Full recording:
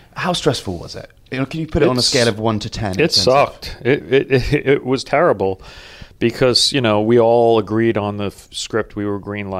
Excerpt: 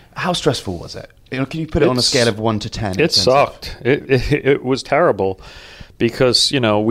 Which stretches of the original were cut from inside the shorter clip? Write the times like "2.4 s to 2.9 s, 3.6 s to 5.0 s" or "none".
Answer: 4.0 s to 4.3 s